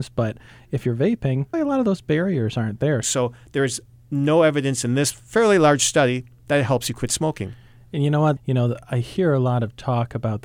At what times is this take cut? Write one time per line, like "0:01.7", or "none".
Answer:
0:01.5
0:03.0
0:08.4

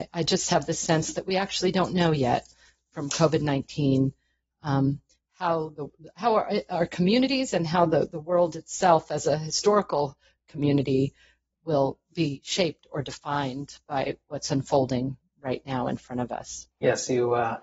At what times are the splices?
none

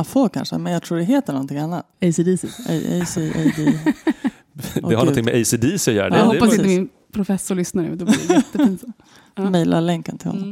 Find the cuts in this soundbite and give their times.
0:01.9

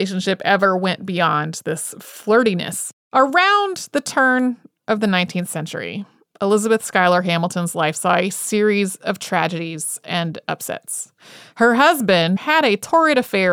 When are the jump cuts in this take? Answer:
0:03.1
0:12.4

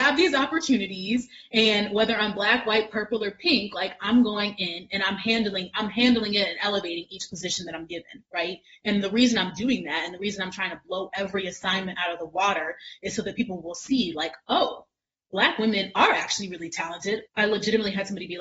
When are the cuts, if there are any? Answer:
0:17.3

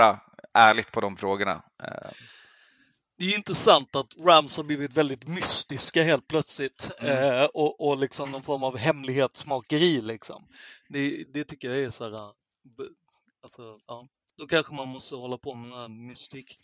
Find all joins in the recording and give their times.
0:11.3
0:14.3

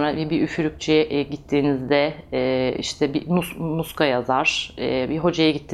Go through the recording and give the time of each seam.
none

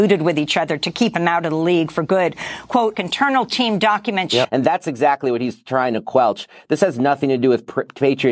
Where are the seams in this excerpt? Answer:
0:02.9
0:04.4

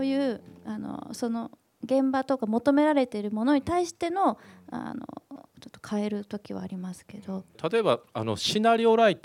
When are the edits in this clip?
0:07.5

